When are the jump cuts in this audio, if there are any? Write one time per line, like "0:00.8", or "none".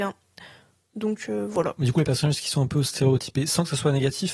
0:01.8